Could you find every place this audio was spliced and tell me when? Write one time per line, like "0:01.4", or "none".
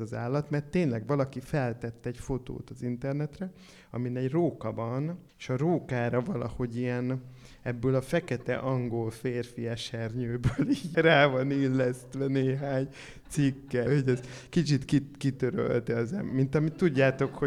0:05.3
0:10.9
0:13.9